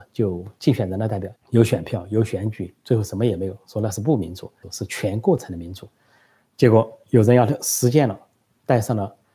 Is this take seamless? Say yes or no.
no